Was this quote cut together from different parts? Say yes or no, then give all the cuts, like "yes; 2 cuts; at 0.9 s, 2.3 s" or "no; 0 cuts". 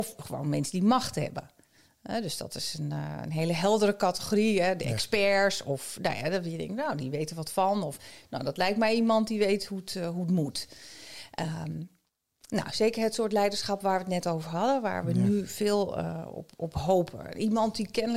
no; 0 cuts